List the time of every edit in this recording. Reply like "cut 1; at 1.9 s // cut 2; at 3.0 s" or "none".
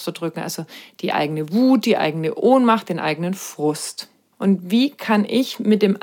cut 1; at 4.3 s